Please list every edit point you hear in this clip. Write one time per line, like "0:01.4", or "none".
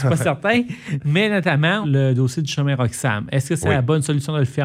0:01.8